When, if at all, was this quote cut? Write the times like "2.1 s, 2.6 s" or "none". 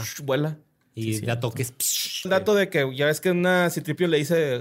2.2 s